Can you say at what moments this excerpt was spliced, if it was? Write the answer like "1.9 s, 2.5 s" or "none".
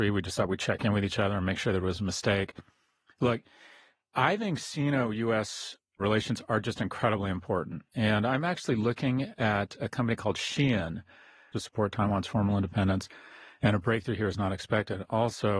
6.0 s, 11.5 s